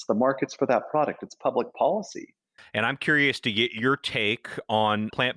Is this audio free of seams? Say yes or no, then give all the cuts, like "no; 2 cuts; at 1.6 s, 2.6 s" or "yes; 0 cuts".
no; 1 cut; at 2.6 s